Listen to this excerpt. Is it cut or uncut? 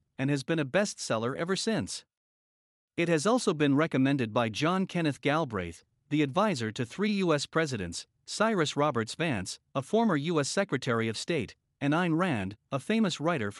uncut